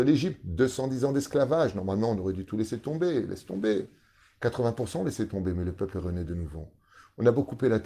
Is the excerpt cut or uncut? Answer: uncut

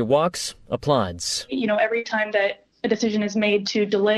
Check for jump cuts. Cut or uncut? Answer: uncut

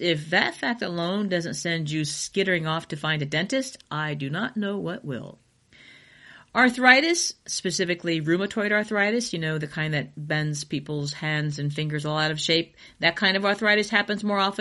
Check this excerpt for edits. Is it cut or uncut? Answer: uncut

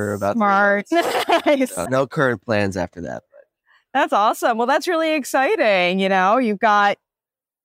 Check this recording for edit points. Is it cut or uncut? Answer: cut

